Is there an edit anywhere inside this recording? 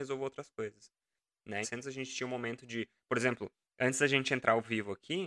yes; 1 cut; at 1.6 s

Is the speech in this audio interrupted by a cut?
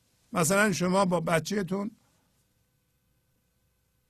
no; 0 cuts

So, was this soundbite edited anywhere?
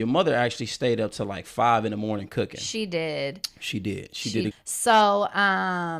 yes; 1 cut; at 4.5 s

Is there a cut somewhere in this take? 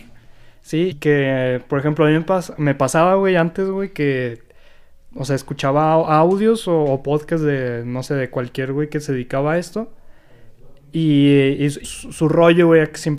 yes; 2 cuts; at 0.9 s, 11.8 s

